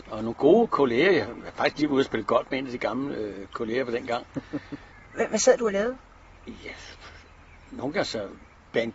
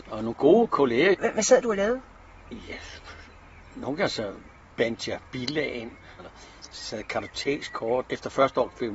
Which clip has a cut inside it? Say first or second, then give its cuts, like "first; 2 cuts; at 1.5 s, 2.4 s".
second; 3 cuts; at 1.1 s, 6.2 s, 8.0 s